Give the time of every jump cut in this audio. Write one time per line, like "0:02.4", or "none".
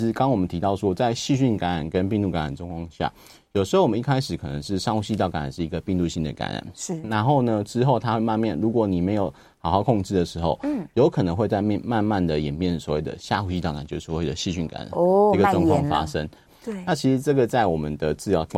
0:16.5